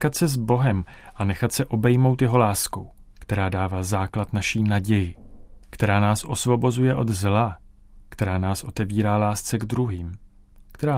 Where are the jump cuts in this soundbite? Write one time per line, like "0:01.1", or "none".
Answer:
none